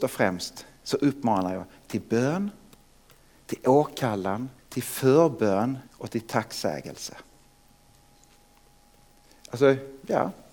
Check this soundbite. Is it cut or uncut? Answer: cut